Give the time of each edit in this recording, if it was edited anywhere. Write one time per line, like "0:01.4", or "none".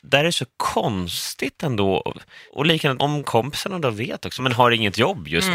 0:03.0
0:04.4